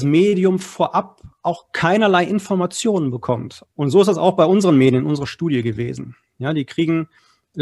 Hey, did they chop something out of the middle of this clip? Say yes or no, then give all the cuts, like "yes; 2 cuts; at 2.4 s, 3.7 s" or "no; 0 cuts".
yes; 1 cut; at 3.6 s